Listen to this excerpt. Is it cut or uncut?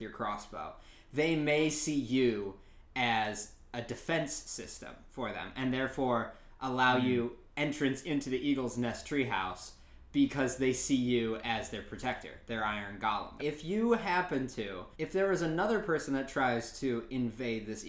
cut